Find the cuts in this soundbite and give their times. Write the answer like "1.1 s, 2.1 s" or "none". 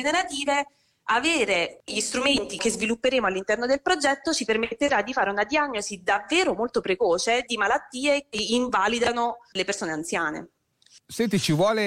none